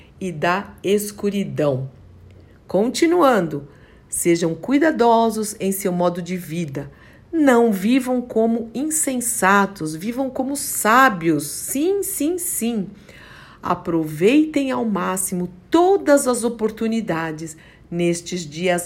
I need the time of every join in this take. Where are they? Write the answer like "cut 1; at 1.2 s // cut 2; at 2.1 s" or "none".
none